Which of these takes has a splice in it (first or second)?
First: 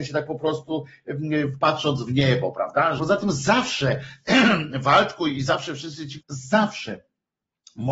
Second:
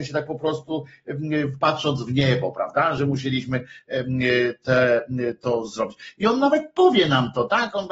first